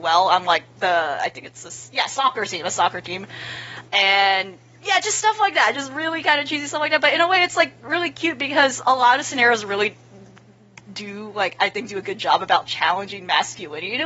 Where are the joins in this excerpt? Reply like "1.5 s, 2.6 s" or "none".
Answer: none